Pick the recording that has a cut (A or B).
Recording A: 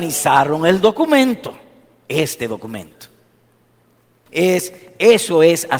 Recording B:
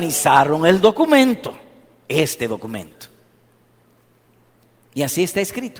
A